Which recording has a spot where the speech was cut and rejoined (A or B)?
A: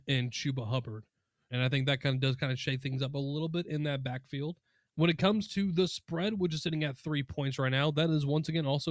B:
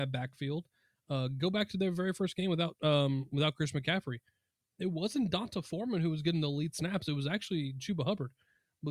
A